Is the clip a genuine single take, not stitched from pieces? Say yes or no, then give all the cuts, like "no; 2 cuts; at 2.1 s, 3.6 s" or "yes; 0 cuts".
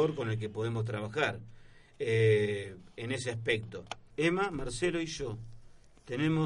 no; 1 cut; at 4.1 s